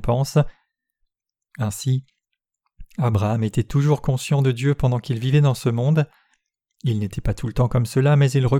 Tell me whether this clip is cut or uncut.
uncut